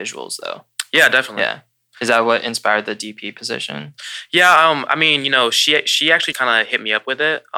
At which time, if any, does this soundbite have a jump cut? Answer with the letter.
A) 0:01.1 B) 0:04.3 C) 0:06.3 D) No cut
C